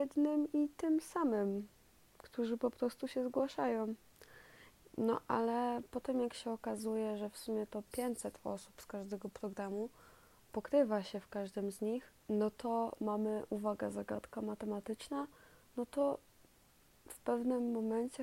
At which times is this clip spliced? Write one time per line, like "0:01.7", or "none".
0:04.8
0:12.2